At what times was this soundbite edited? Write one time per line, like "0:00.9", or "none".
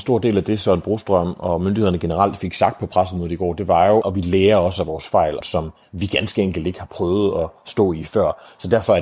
0:04.0
0:05.4